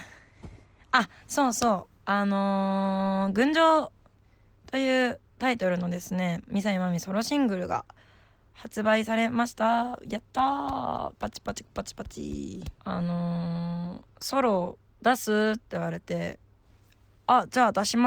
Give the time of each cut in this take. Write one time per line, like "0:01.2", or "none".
0:05.3
0:12.8
0:14.1